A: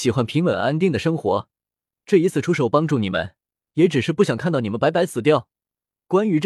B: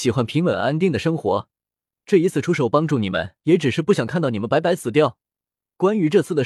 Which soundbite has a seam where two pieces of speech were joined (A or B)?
B